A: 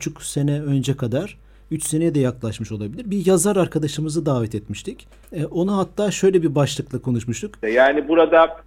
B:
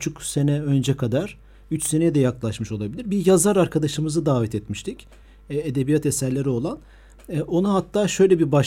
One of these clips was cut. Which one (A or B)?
A